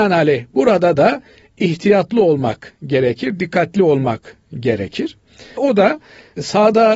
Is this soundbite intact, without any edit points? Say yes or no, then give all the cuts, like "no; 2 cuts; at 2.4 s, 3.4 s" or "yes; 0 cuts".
no; 1 cut; at 5.6 s